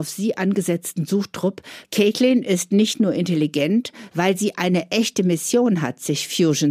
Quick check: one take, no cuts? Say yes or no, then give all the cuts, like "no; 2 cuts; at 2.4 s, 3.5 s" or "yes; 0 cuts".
no; 2 cuts; at 1.8 s, 4.1 s